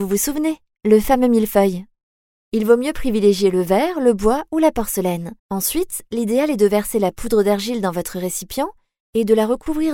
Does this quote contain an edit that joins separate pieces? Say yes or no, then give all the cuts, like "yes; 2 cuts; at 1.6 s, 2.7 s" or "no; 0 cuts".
yes; 1 cut; at 5.4 s